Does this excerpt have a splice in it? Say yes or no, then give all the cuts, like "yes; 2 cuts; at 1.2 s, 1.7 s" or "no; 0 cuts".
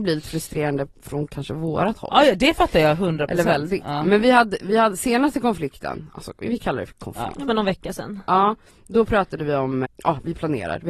yes; 1 cut; at 9.8 s